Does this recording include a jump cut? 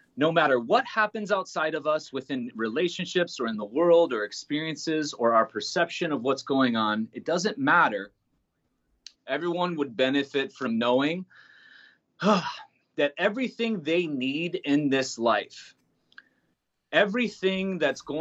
yes; 1 cut; at 9.2 s

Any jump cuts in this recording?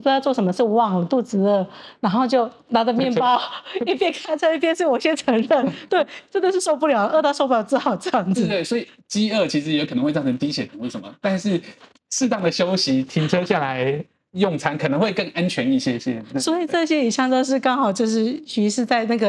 no; 0 cuts

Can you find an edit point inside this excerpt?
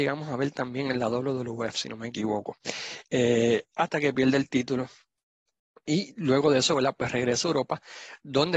no; 0 cuts

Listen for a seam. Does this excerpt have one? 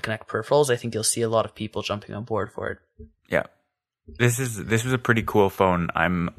no; 0 cuts

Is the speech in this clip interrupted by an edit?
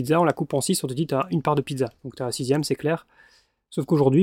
no; 0 cuts

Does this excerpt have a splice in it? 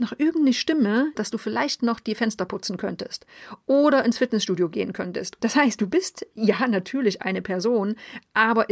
yes; 2 cuts; at 1.1 s, 5.4 s

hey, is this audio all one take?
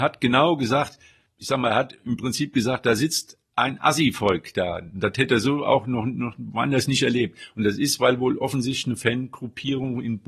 yes; 0 cuts

